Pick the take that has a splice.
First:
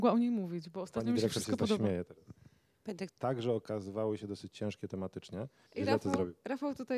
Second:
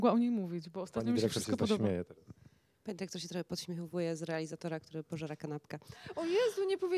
first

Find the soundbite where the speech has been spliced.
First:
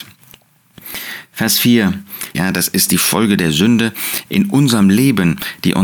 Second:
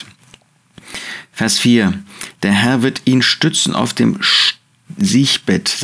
first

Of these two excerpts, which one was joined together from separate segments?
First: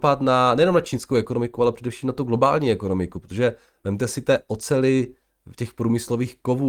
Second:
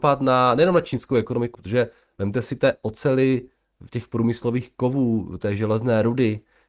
second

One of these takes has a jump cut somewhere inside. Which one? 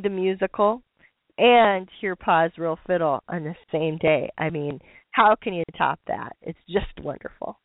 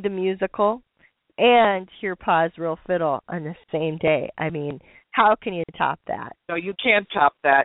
second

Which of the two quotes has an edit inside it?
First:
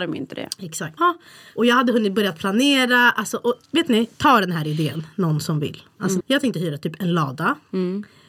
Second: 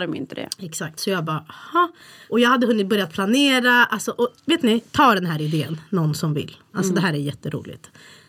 first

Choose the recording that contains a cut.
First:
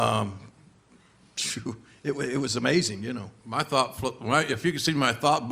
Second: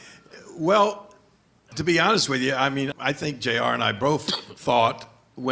second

